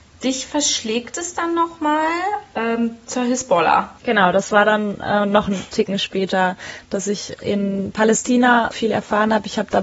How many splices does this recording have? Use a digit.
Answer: 3